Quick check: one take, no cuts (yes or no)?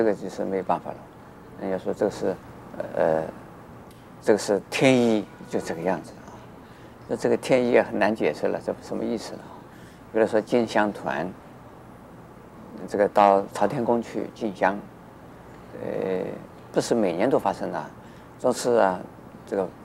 yes